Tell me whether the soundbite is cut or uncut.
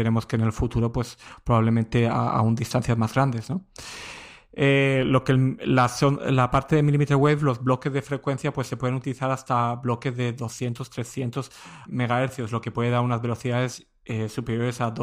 cut